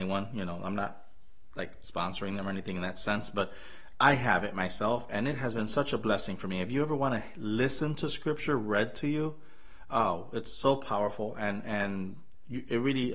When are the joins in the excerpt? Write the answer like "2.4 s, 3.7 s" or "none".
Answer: none